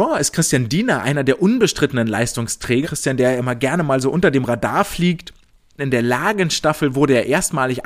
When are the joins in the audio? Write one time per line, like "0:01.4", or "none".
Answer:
0:02.8
0:05.8